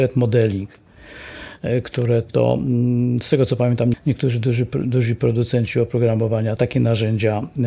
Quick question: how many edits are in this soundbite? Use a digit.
2